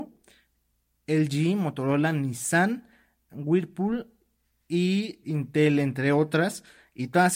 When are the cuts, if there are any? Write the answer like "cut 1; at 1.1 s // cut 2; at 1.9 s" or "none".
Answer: cut 1; at 5.2 s